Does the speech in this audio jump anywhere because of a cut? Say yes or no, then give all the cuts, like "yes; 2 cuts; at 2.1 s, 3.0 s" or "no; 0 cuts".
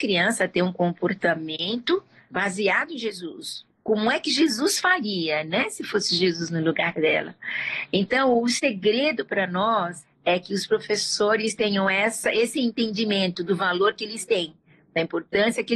no; 0 cuts